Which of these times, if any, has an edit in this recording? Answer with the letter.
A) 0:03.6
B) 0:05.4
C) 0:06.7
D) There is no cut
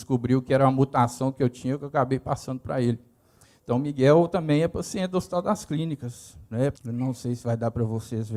C